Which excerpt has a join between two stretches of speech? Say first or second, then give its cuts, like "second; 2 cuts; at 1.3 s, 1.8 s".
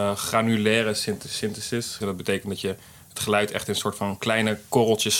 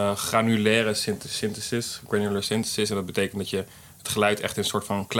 first; 1 cut; at 2.0 s